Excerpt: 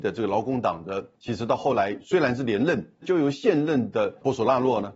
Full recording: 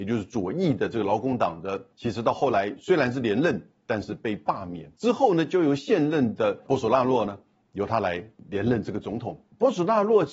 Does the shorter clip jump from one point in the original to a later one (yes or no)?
yes